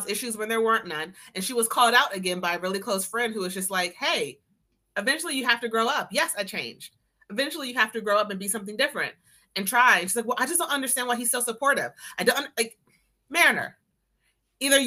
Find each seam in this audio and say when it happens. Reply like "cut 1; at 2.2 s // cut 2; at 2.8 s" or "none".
none